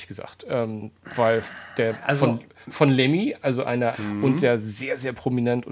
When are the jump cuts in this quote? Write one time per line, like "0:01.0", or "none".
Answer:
0:03.9

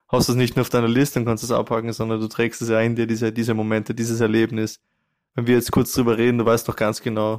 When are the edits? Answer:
none

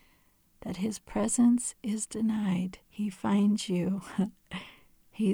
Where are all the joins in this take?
0:02.8

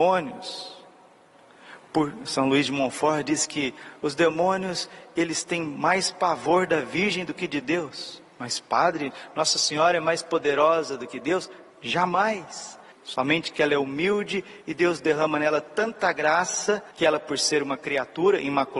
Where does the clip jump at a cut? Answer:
0:11.7
0:12.9
0:16.9

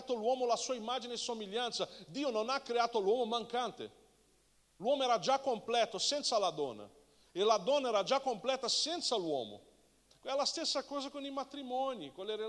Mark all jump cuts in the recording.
0:10.1

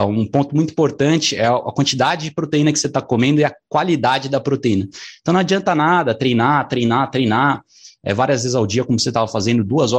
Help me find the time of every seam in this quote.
none

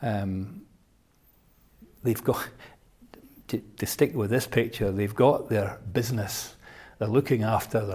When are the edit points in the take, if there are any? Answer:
0:03.6

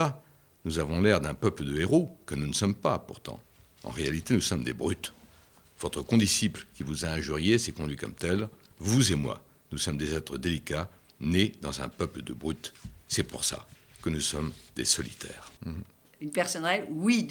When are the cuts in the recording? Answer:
0:15.6

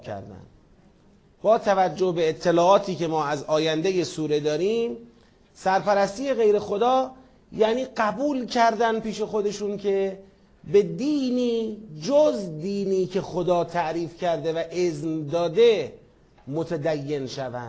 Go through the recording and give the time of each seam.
0:01.2

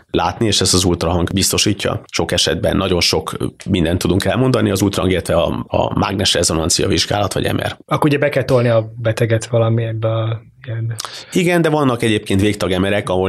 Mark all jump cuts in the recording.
0:07.8

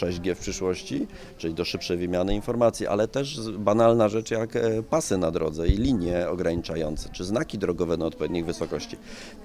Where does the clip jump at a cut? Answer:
none

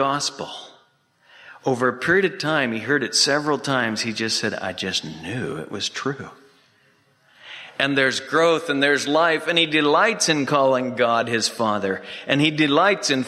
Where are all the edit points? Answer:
none

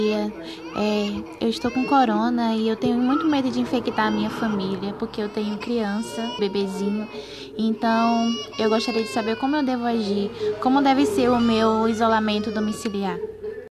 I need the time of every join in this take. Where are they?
0:06.4

